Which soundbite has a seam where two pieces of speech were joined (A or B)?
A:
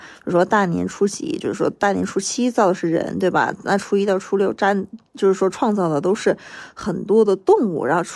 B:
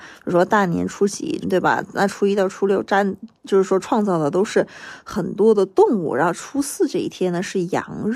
B